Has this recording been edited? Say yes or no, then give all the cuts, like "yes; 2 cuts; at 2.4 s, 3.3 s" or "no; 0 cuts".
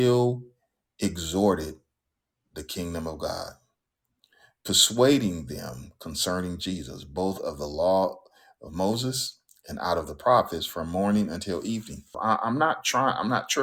yes; 1 cut; at 12.1 s